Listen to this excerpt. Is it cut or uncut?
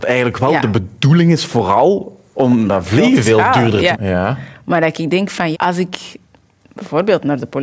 cut